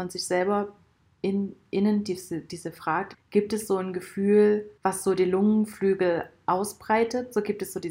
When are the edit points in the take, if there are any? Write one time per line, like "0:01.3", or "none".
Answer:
0:03.1
0:04.8